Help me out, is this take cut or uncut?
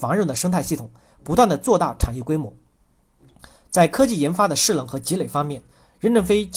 uncut